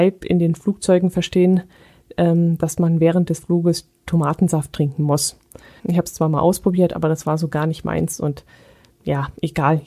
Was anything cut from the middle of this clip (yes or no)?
yes